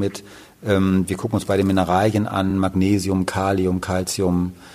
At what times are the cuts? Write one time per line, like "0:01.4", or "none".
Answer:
none